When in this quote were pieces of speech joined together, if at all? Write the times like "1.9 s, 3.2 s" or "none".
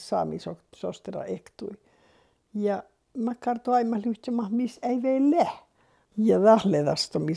6.0 s